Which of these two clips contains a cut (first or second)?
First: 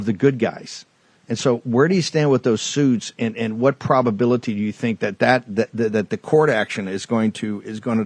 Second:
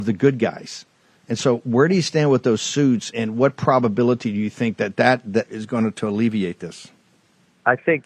second